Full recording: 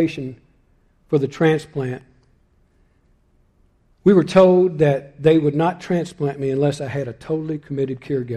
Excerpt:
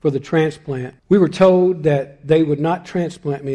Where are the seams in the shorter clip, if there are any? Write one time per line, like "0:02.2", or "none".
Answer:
0:01.0